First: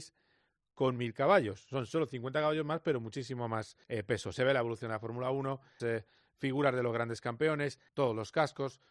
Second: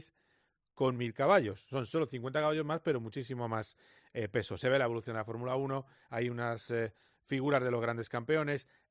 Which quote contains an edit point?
first; 3 cuts; at 3.8 s, 5.8 s, 7.9 s

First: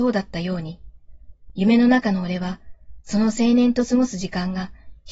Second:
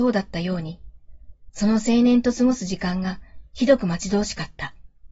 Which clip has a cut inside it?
second; 1 cut; at 1.5 s

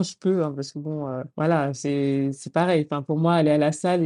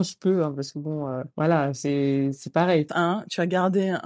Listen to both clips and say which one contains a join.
second; 1 cut; at 2.9 s

